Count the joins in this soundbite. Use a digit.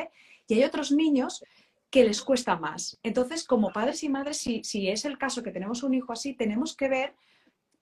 0